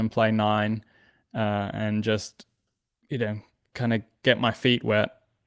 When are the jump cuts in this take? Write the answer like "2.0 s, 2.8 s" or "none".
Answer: none

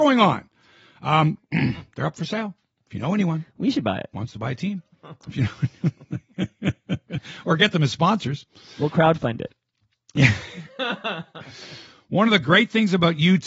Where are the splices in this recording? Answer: 1.4 s

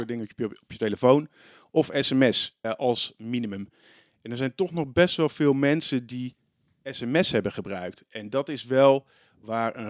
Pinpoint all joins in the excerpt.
2.6 s

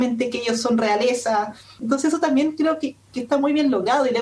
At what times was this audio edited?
1.8 s

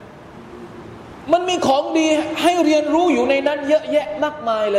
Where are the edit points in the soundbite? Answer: none

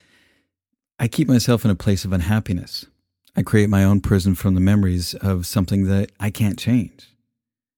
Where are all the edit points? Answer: none

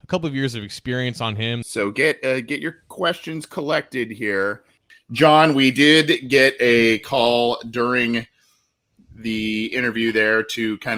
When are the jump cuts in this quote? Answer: 1.6 s

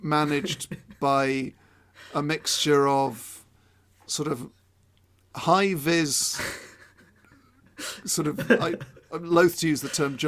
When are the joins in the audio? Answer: none

